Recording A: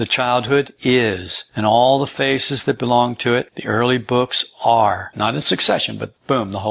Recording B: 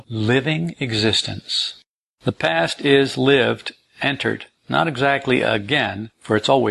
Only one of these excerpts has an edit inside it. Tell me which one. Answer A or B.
A